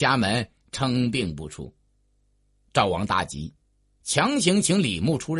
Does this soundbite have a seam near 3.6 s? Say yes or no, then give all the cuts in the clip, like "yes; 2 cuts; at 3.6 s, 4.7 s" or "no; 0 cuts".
no; 0 cuts